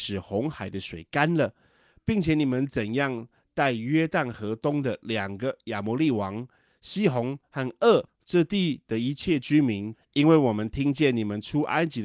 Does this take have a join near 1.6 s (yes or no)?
no